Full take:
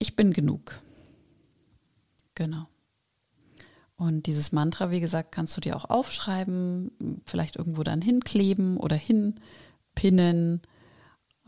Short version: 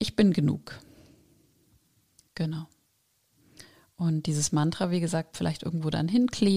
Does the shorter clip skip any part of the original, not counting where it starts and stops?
yes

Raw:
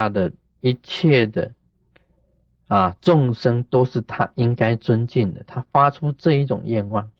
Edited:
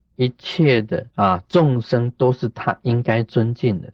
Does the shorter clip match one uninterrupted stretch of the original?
no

